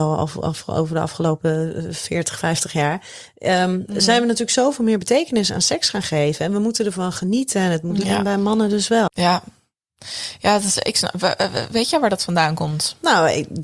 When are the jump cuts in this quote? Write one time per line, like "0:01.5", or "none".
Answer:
0:08.0
0:09.1